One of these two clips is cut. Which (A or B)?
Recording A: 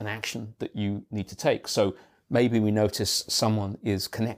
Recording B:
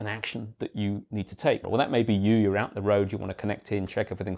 B